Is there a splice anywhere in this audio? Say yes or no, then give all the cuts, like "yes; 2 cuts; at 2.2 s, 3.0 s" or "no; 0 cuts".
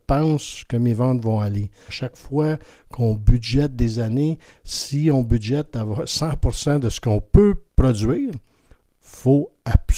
yes; 2 cuts; at 1.9 s, 7.7 s